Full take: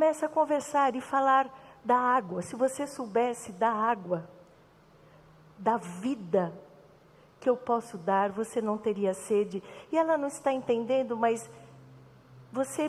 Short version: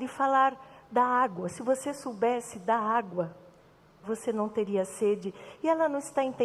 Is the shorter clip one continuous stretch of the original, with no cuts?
no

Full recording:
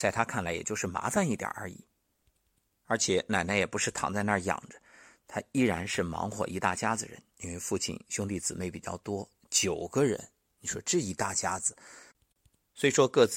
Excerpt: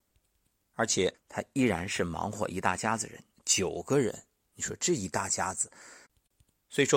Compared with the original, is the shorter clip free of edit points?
no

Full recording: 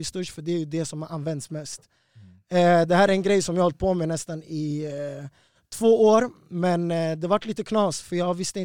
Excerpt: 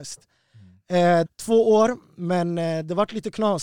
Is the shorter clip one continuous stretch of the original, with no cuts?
no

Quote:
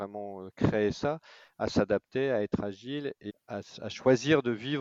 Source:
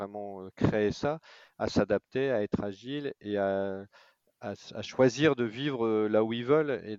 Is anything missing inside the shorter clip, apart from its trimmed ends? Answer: yes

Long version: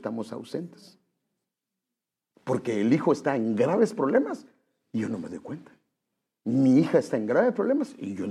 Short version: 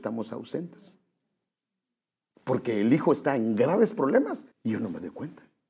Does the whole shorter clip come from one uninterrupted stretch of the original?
no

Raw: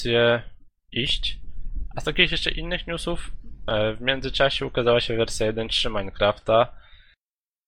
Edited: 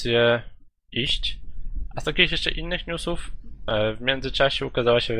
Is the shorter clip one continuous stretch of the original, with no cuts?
yes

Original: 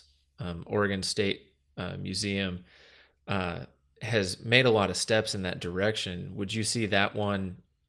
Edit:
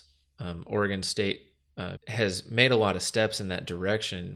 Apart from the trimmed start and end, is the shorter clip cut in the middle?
yes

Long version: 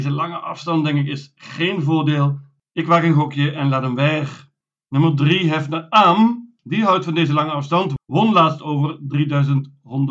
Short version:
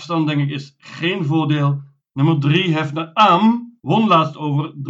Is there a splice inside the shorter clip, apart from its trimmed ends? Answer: yes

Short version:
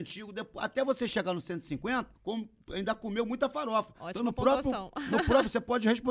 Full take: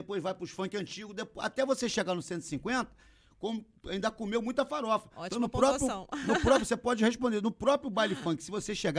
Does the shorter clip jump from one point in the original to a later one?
yes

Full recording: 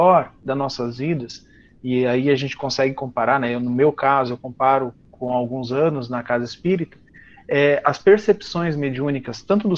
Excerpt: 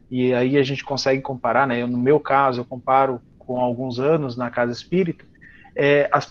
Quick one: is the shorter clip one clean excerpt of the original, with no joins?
yes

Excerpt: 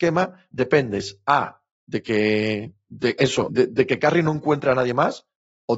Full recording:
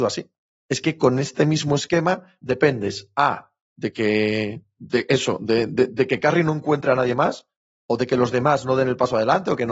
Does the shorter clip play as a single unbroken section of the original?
no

